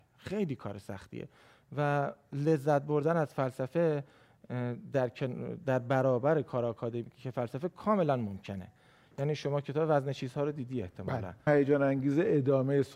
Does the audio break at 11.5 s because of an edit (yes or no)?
yes